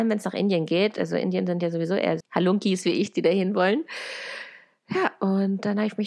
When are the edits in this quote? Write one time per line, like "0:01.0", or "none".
0:02.2